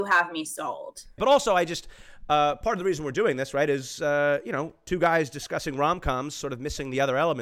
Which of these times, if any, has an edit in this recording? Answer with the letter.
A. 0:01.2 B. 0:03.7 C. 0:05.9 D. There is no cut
A